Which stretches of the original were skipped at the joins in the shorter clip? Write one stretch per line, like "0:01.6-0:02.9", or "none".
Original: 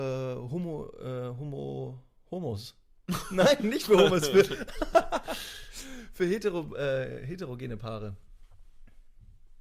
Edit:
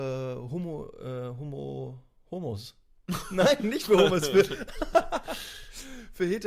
none